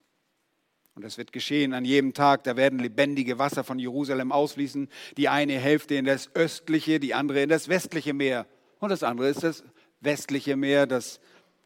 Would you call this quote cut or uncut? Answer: cut